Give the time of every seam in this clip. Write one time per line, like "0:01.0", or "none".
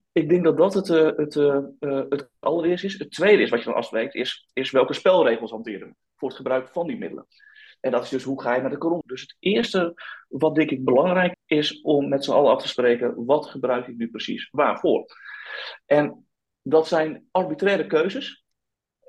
0:09.0
0:11.3

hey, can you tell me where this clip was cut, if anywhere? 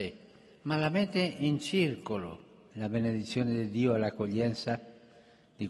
0:02.7

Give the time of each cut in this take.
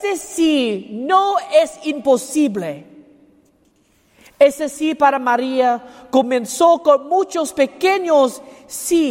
none

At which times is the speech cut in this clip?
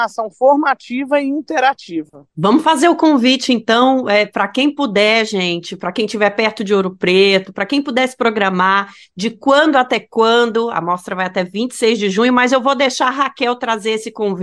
none

